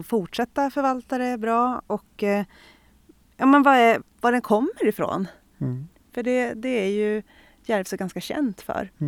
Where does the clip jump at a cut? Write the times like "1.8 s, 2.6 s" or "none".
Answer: 4.0 s

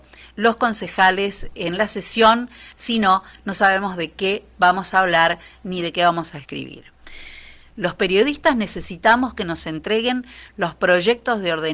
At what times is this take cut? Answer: 2.7 s, 7.7 s

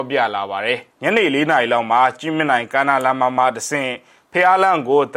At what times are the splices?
0.9 s

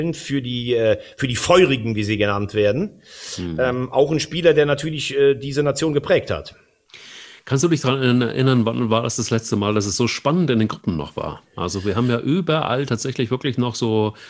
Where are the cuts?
none

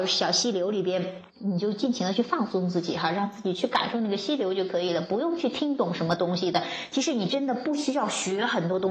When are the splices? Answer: 1.3 s

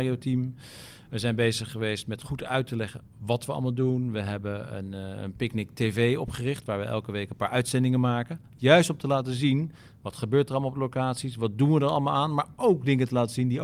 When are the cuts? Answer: none

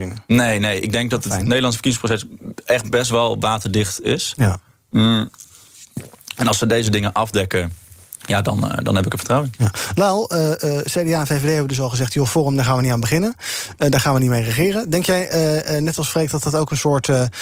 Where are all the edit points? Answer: none

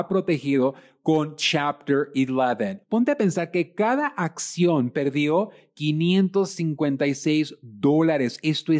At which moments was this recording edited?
2.8 s

